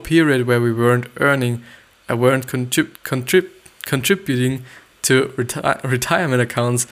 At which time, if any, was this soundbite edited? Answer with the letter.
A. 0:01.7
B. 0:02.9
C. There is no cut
B